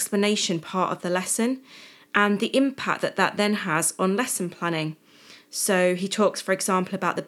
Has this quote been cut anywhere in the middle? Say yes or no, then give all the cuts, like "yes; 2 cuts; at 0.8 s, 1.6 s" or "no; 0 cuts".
no; 0 cuts